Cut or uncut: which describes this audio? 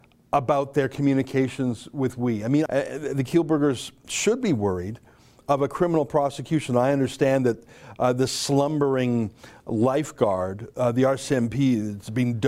cut